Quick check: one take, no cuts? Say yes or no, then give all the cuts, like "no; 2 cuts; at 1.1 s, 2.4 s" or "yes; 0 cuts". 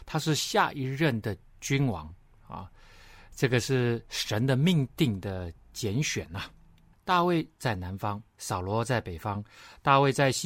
no; 2 cuts; at 6.9 s, 8.3 s